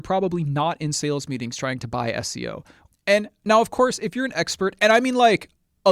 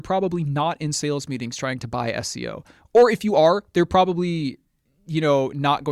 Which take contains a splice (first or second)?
first